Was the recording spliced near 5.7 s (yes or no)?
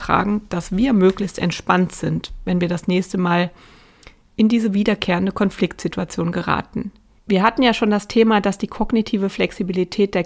no